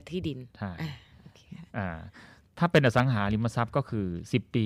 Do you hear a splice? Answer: no; 0 cuts

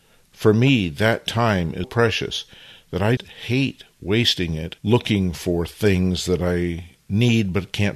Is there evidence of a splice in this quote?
yes; 3 cuts; at 1.8 s, 3.2 s, 4.8 s

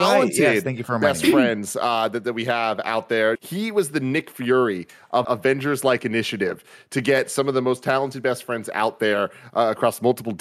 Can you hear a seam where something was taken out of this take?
yes; 2 cuts; at 3.3 s, 5.2 s

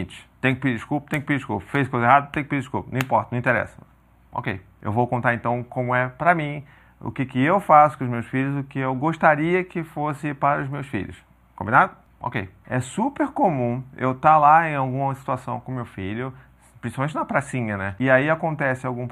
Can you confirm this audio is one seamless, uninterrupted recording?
yes; 0 cuts

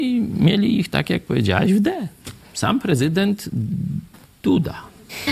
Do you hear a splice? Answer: no; 0 cuts

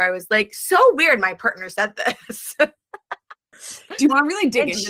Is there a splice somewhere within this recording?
no; 0 cuts

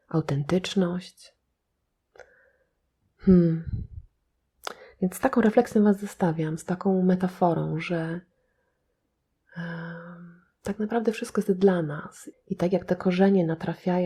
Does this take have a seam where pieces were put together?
yes; 1 cut; at 12.3 s

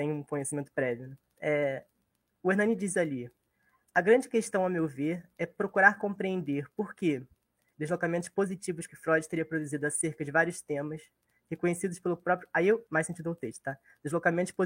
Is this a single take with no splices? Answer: no; 3 cuts; at 1.3 s, 7.7 s, 12.9 s

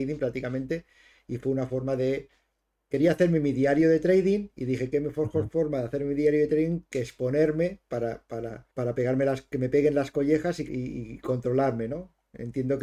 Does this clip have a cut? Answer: yes; 2 cuts; at 8.7 s, 10.7 s

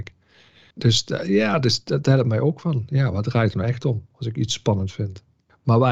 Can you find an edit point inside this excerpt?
no; 0 cuts

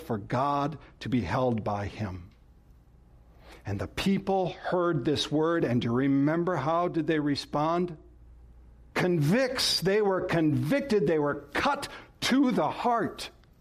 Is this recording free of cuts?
no; 1 cut; at 8.9 s

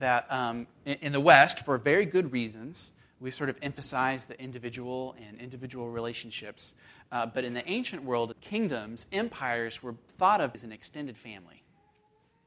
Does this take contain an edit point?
yes; 2 cuts; at 8.3 s, 10.5 s

